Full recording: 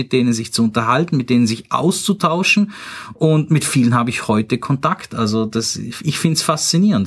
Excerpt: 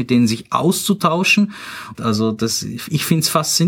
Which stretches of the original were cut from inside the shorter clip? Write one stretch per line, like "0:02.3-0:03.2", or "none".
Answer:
0:03.1-0:05.1